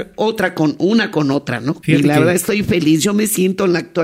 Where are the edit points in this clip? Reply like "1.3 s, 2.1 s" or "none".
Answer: none